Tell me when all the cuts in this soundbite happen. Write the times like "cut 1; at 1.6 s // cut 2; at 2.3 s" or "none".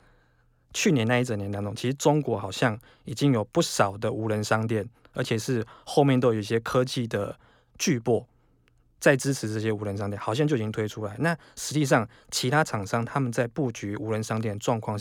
none

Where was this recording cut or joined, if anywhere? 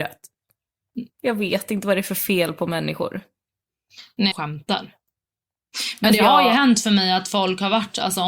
cut 1; at 1.1 s // cut 2; at 4.3 s

